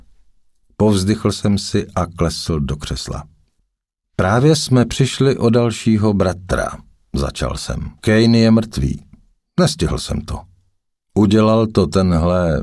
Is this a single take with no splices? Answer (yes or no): no